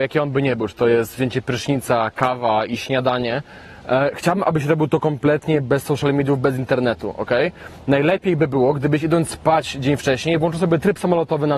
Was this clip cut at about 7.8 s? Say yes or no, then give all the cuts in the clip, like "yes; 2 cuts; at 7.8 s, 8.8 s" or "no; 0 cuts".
no; 0 cuts